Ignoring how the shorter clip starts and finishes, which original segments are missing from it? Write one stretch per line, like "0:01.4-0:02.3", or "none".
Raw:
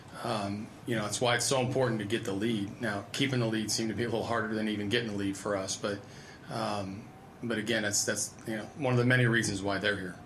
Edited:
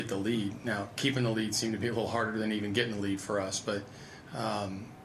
none